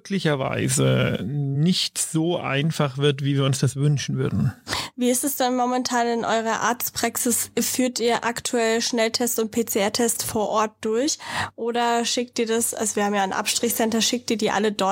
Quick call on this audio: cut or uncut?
uncut